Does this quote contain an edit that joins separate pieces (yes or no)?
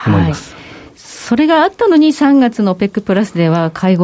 no